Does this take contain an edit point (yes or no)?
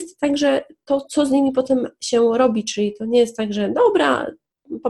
no